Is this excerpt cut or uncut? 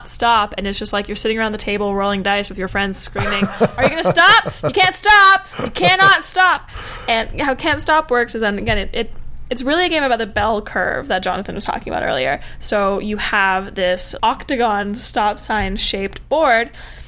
uncut